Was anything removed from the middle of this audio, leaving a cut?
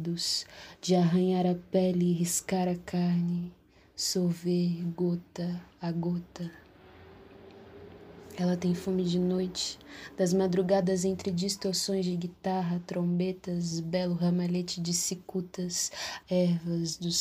yes; 2 cuts; at 13.7 s, 16.2 s

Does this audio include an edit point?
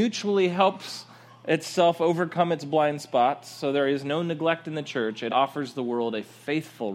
yes; 1 cut; at 5.3 s

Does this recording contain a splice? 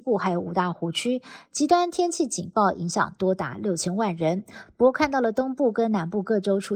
no; 0 cuts

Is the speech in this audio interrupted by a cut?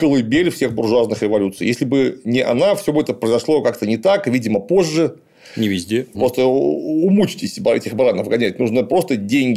yes; 1 cut; at 6.1 s

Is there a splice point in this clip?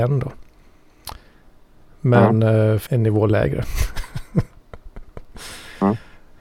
yes; 1 cut; at 2.9 s

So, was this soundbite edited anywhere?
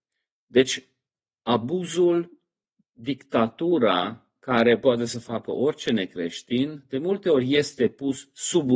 no; 0 cuts

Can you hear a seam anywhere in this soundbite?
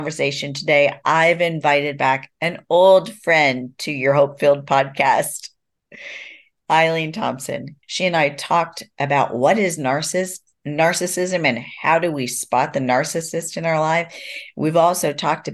yes; 1 cut; at 7.8 s

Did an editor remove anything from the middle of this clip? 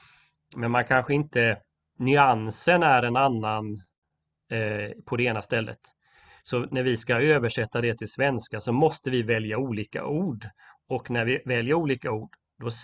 no; 0 cuts

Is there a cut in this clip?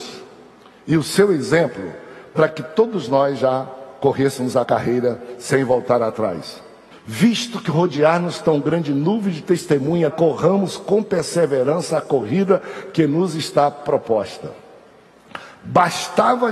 yes; 3 cuts; at 4.6 s, 6.9 s, 10.1 s

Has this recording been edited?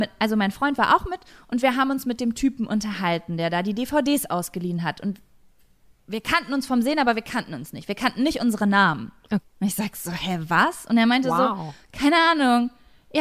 yes; 1 cut; at 9.4 s

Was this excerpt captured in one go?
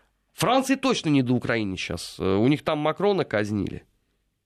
yes; 0 cuts

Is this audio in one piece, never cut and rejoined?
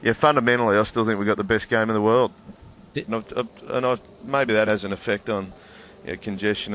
no; 2 cuts; at 3.1 s, 4.7 s

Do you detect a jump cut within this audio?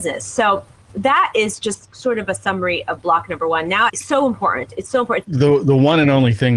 yes; 2 cuts; at 3.9 s, 5.2 s

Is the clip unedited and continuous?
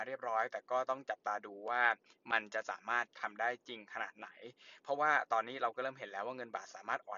yes; 0 cuts

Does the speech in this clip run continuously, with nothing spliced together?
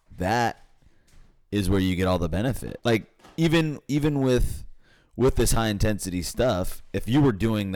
no; 1 cut; at 2.8 s

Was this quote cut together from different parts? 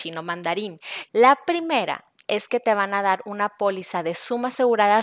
yes; 1 cut; at 1.1 s

